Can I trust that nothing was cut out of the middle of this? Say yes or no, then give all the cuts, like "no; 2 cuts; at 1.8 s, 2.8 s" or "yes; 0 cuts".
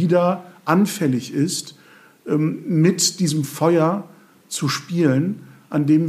yes; 0 cuts